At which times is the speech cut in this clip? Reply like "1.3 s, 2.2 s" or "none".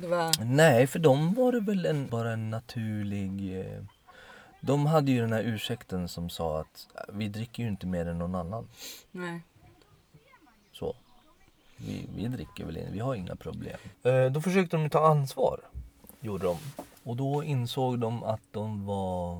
2.1 s, 13.9 s